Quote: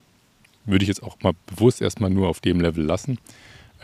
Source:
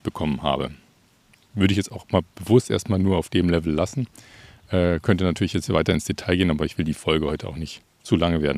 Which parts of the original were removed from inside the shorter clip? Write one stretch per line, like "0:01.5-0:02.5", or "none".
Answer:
none